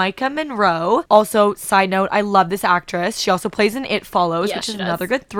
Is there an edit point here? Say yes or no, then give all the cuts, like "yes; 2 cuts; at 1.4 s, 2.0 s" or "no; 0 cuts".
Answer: no; 0 cuts